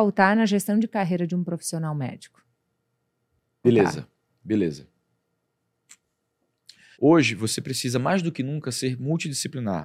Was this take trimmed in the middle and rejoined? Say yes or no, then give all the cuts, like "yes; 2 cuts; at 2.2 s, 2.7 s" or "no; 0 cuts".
yes; 2 cuts; at 3.6 s, 6.9 s